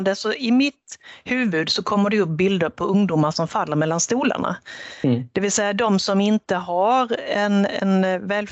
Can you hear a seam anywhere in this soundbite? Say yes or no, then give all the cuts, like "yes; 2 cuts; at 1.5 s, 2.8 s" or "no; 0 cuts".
no; 0 cuts